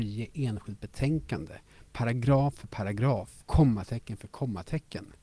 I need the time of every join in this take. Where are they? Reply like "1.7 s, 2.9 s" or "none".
3.4 s